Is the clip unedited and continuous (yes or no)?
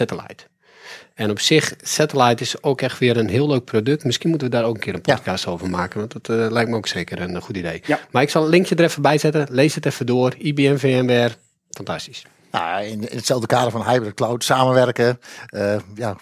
yes